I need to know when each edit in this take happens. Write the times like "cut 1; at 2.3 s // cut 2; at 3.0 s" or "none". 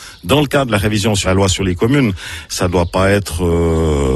cut 1; at 1.2 s // cut 2; at 2.5 s